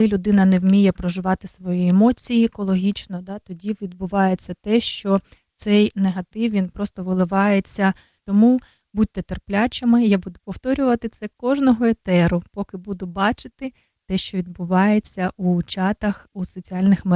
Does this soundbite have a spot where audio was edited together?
yes; 1 cut; at 8.2 s

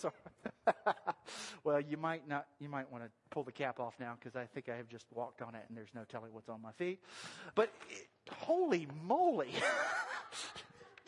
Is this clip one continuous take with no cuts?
no; 1 cut; at 7.5 s

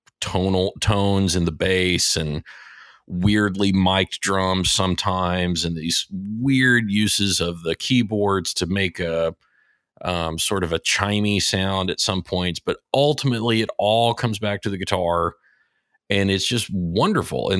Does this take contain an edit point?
no; 0 cuts

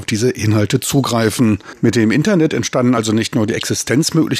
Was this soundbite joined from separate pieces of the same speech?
no; 0 cuts

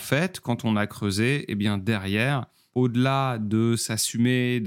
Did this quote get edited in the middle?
no; 0 cuts

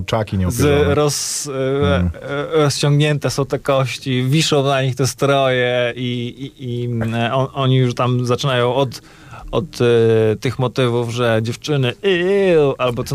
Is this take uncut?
yes; 0 cuts

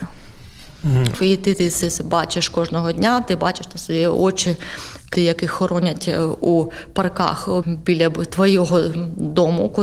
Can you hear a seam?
yes; 3 cuts; at 1.1 s, 5.1 s, 7.6 s

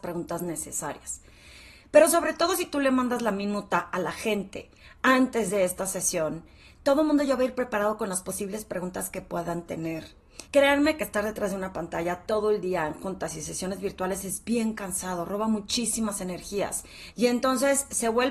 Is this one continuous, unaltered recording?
no; 2 cuts; at 10.5 s, 17.1 s

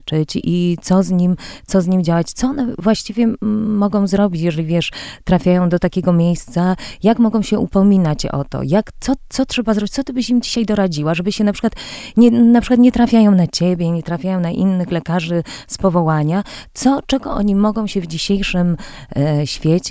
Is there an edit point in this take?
no; 0 cuts

